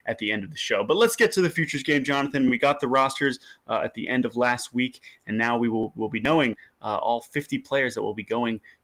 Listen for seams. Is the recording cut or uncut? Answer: uncut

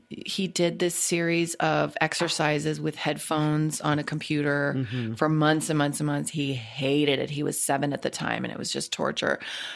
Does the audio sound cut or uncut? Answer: uncut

